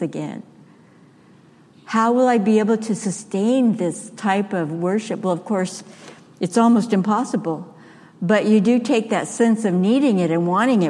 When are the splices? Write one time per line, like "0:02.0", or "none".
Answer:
none

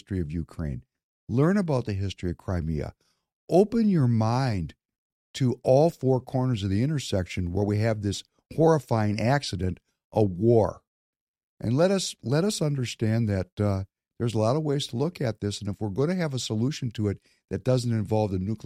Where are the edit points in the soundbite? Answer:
none

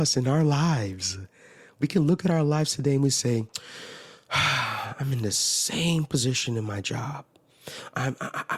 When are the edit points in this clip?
none

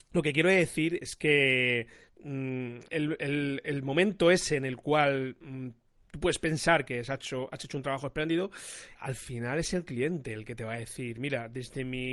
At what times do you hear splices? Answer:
0:02.9
0:08.9

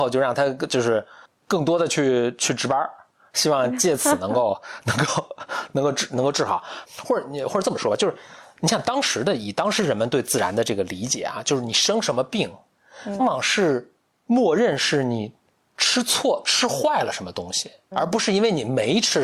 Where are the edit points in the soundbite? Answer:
0:13.2
0:17.9

